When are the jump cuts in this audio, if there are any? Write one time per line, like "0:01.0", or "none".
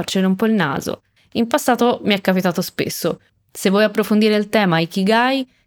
0:01.2
0:03.3